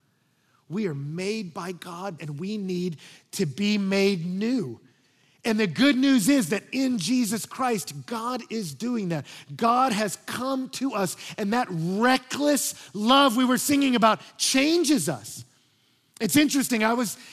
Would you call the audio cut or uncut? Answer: cut